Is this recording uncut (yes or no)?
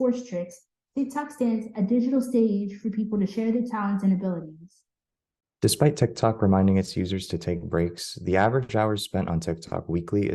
yes